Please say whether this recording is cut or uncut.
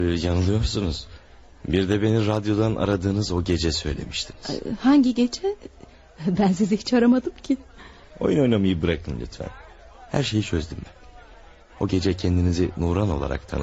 uncut